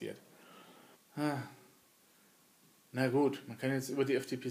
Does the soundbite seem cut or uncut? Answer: cut